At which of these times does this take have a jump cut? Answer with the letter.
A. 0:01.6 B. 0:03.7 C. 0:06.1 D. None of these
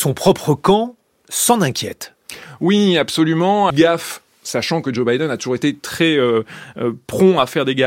B